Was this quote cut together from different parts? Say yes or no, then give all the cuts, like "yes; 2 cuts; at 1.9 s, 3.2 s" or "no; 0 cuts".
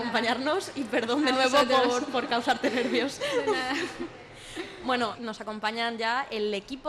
yes; 1 cut; at 5.1 s